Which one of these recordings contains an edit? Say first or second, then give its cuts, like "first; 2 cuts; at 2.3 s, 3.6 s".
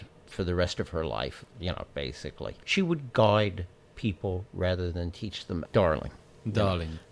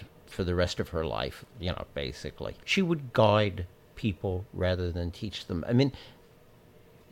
first; 1 cut; at 5.7 s